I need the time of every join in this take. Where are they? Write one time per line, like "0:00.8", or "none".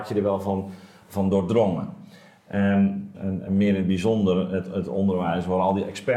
0:03.1

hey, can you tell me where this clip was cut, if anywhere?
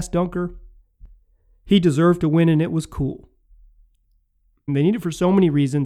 0:04.7

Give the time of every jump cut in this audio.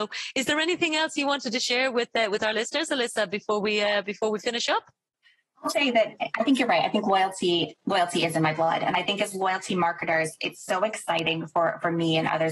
0:05.7

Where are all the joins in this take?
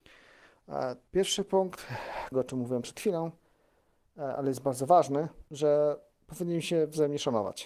0:01.1
0:02.3
0:05.5

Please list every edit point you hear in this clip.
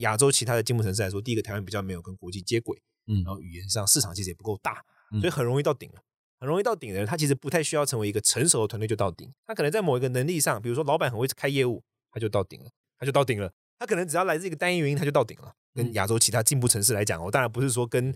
0:09.4
0:12.8
0:15.6

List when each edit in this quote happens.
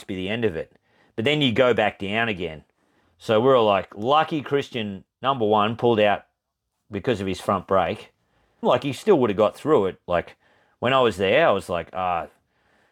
0:03.0
0:08.6
0:10.0

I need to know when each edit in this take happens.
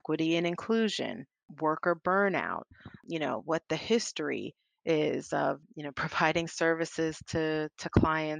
none

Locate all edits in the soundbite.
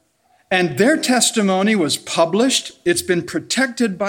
none

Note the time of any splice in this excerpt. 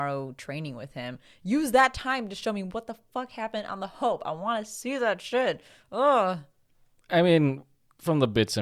none

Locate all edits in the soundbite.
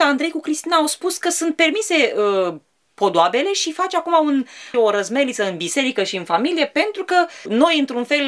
0:04.7

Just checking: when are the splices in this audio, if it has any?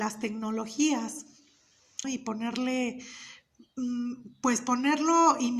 0:02.0

